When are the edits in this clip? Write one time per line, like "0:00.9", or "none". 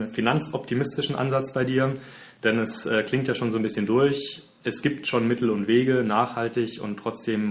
none